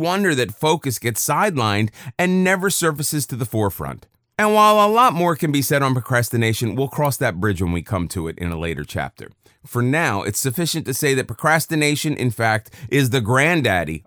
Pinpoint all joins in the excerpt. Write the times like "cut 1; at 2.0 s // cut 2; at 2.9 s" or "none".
none